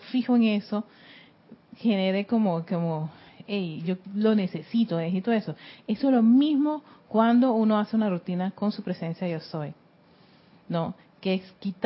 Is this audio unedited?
yes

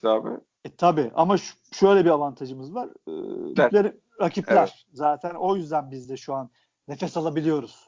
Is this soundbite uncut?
no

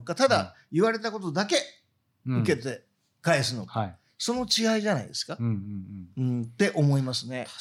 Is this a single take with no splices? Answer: yes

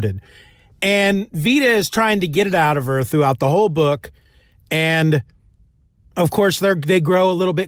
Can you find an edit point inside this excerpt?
no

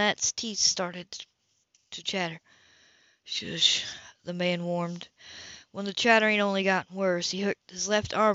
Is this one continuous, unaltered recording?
yes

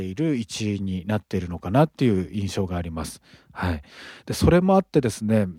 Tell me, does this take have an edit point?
no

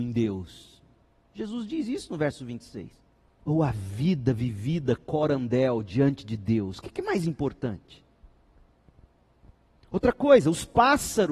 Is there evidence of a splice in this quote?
yes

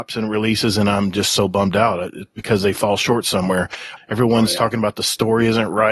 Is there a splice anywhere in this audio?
yes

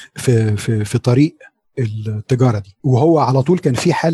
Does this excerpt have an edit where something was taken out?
yes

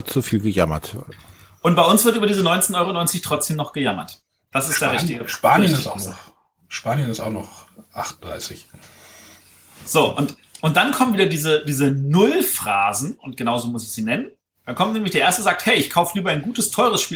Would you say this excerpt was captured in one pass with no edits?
yes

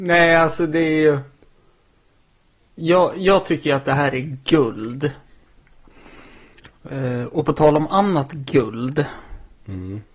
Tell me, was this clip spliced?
no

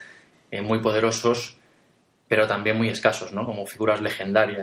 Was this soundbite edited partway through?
no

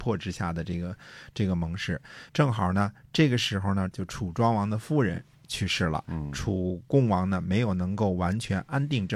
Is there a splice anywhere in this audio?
yes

